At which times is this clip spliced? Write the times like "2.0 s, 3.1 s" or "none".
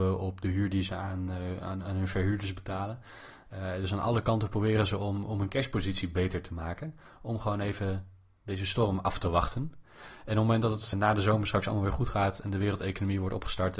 10.9 s